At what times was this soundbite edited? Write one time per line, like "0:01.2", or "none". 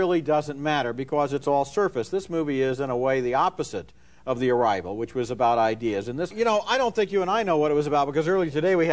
0:06.3